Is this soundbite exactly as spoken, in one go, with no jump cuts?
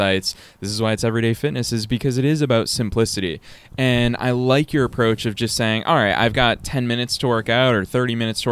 yes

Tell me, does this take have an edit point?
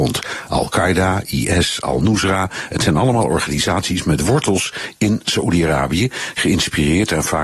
no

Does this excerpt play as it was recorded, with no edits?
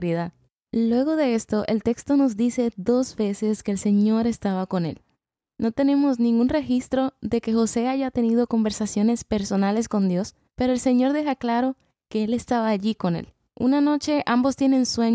no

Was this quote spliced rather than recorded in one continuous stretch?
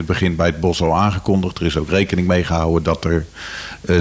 no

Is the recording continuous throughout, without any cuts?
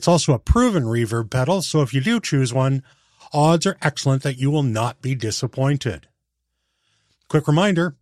yes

